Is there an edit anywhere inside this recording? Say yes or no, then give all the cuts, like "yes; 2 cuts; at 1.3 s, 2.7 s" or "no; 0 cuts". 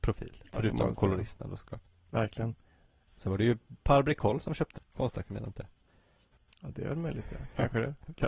yes; 1 cut; at 4.8 s